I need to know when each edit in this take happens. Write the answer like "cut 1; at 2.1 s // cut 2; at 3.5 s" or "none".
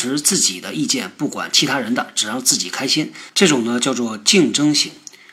cut 1; at 3.3 s